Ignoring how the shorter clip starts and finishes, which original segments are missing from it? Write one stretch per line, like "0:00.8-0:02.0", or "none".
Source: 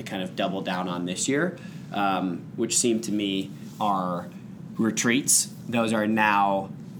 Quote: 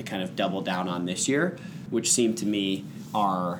0:01.9-0:02.5